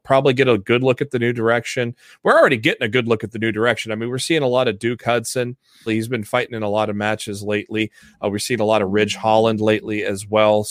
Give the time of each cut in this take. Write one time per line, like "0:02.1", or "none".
0:05.9

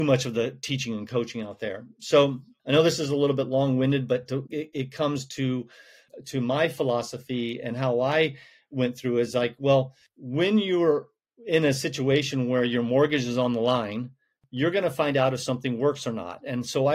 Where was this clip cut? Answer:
0:04.4

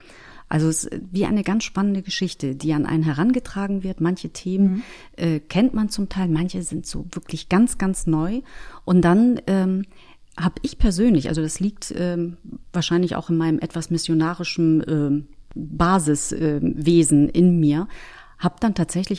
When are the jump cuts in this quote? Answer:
none

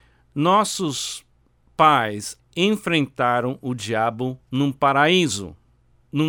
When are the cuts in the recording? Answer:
0:02.4
0:04.4

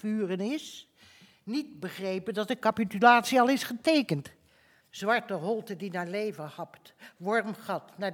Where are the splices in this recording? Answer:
0:04.8

